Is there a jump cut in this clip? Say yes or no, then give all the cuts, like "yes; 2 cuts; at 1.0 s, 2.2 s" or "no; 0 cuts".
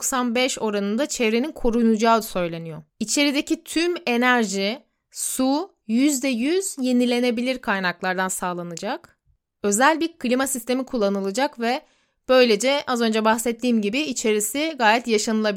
yes; 1 cut; at 2.9 s